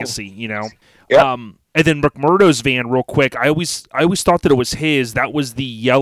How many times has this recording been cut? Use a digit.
0